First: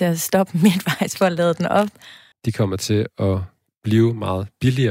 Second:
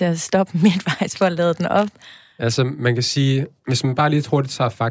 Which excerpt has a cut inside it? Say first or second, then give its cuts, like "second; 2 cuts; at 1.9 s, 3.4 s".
first; 1 cut; at 2.3 s